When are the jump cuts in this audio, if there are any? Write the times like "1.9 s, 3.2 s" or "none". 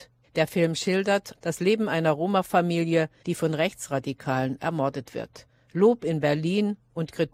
1.3 s

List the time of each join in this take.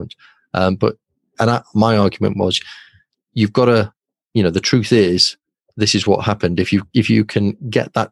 1.3 s

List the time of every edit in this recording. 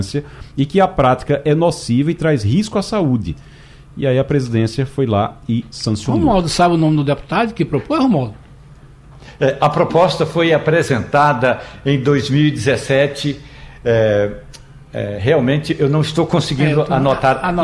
none

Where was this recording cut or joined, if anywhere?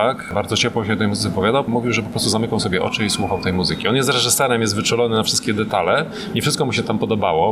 none

